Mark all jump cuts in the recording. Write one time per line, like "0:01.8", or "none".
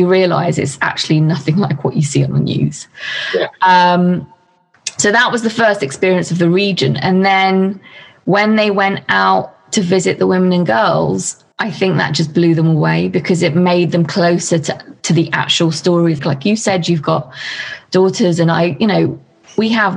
0:11.5
0:16.2